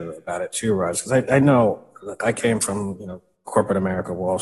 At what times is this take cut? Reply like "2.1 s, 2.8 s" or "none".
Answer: none